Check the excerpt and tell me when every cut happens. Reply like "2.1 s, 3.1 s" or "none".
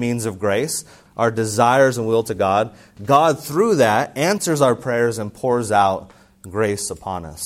1.1 s